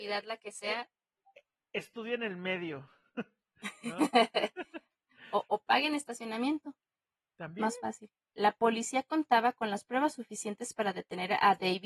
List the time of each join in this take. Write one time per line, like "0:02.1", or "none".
0:08.3